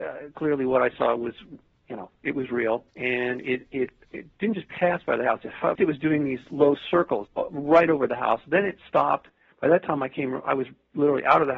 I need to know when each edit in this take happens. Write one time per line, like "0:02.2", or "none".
0:02.9
0:05.8
0:07.3